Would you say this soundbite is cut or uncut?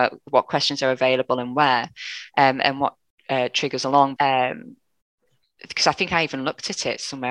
cut